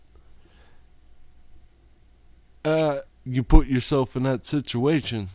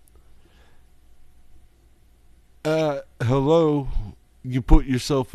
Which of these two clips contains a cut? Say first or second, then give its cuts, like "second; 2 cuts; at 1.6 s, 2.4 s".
first; 1 cut; at 3.1 s